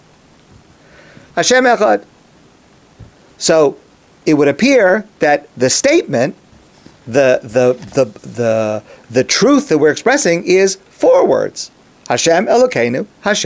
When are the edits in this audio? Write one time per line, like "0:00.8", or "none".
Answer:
0:01.3

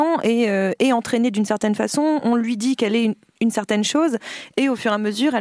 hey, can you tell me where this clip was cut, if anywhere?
none

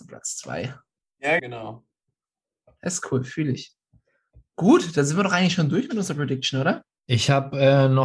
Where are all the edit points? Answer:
0:01.4

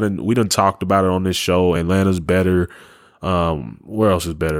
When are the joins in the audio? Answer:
none

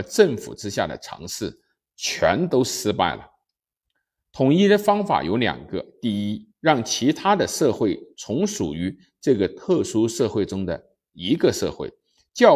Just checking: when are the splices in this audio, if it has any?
none

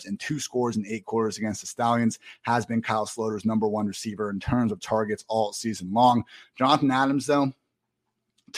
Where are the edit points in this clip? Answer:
none

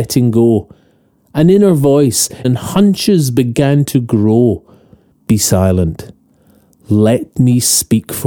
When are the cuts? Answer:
0:02.4
0:05.1

